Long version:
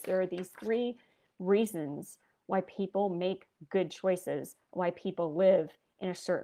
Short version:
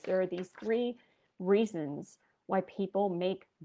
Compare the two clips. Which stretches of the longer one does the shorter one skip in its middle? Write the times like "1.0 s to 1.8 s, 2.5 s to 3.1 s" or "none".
none